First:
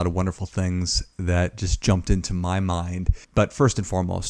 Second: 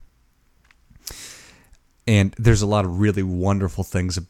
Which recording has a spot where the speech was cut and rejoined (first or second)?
first